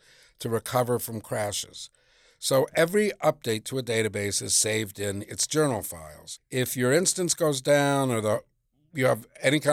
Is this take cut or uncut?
cut